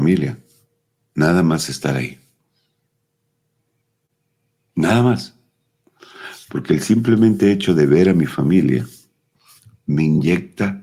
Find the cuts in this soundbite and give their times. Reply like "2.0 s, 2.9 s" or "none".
none